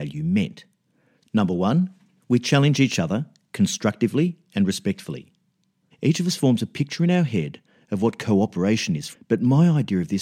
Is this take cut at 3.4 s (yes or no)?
no